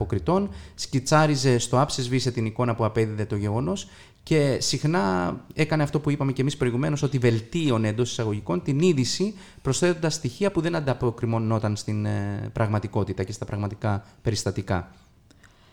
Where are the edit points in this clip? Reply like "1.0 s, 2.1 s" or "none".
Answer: none